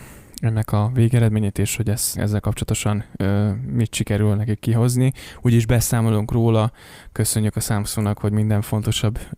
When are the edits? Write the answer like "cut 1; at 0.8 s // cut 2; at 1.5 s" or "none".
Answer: cut 1; at 2.2 s